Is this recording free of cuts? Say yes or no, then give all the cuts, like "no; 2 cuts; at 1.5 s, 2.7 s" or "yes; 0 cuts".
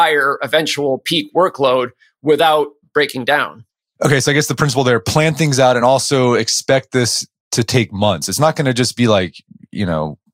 yes; 0 cuts